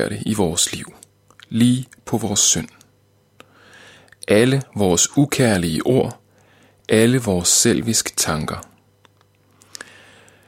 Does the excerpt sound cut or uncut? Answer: uncut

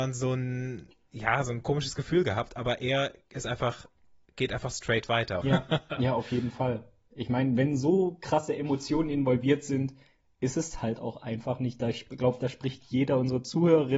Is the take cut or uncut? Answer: cut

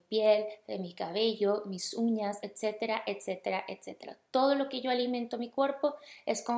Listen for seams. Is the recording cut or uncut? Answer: uncut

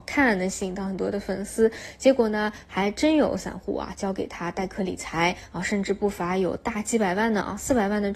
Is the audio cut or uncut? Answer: uncut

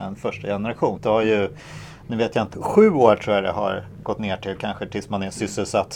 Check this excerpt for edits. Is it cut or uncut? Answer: cut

